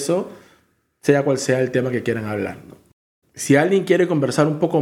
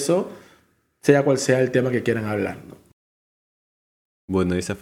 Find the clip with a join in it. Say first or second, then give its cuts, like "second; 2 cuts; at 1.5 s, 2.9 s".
first; 1 cut; at 3.2 s